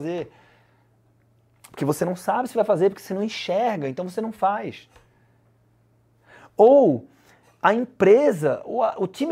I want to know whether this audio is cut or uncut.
uncut